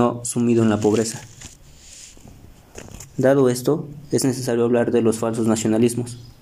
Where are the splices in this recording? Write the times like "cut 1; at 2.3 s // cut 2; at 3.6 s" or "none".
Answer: none